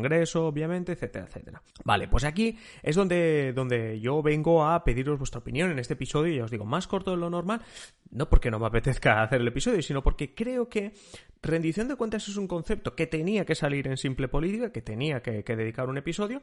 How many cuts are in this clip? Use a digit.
1